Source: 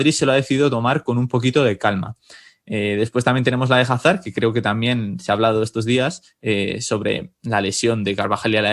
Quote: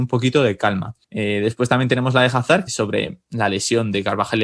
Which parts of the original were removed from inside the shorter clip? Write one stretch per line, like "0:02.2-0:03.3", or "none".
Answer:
0:02.2-0:02.6
0:04.2-0:06.8

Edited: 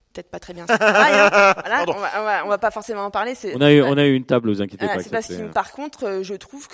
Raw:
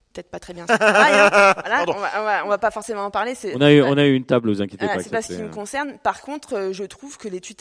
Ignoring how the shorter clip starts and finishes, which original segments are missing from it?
0:05.5-0:06.0

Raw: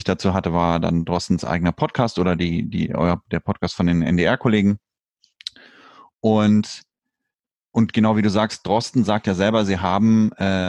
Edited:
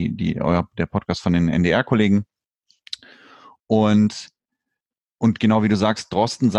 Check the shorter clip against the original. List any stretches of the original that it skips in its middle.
none

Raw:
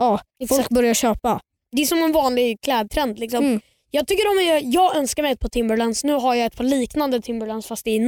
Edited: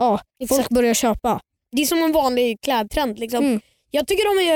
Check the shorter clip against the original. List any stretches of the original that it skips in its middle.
none

